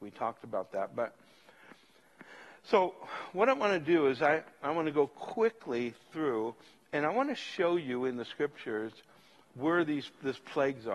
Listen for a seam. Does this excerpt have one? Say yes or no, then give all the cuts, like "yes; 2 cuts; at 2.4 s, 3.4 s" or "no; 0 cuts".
no; 0 cuts